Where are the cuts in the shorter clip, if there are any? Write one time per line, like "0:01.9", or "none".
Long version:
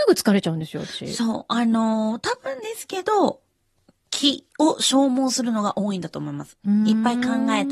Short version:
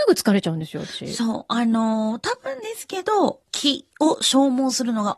0:03.4